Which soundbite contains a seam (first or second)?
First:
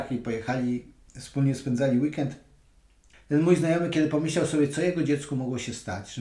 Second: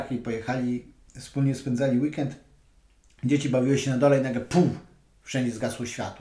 first